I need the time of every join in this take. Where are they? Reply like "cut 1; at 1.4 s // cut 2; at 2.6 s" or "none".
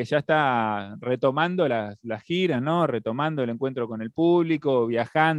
none

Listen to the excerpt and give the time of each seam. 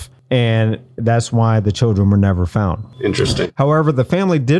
cut 1; at 3.5 s

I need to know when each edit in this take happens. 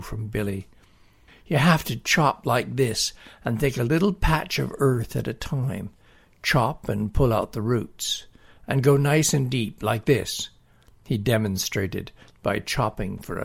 none

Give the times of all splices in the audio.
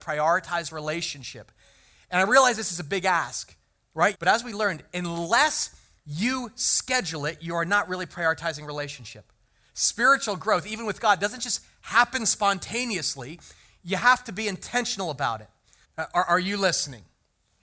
cut 1; at 4.1 s // cut 2; at 15.8 s

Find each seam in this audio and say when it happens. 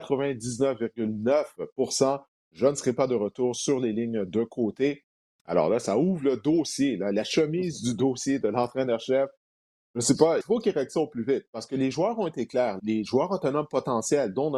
cut 1; at 10.4 s // cut 2; at 12.8 s

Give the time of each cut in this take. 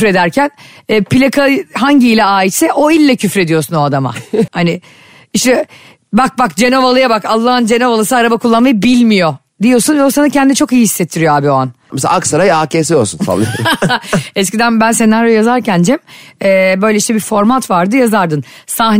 cut 1; at 4.5 s // cut 2; at 11.9 s

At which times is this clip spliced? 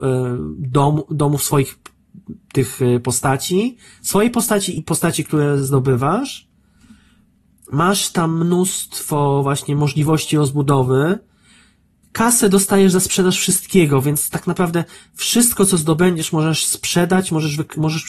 cut 1; at 4.8 s

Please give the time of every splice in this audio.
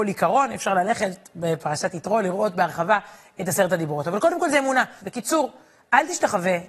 cut 1; at 5.0 s

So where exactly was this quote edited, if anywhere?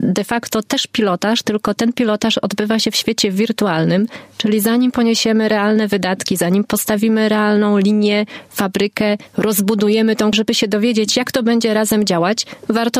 cut 1; at 10.3 s

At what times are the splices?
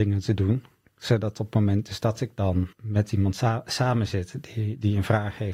cut 1; at 2.7 s

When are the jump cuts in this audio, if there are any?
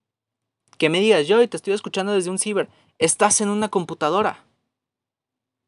none

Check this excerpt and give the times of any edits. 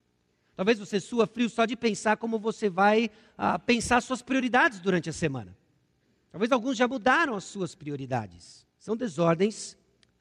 cut 1; at 8.7 s

